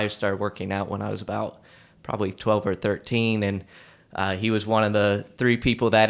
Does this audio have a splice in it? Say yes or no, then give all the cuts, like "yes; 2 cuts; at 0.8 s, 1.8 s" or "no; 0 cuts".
no; 0 cuts